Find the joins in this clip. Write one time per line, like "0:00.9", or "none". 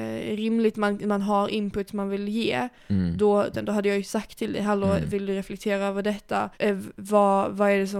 0:03.5
0:06.5